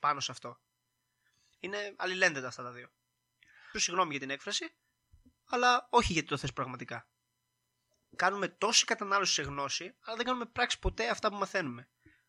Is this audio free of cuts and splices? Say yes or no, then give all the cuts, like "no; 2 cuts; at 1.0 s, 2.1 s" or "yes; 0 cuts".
no; 2 cuts; at 1.6 s, 3.7 s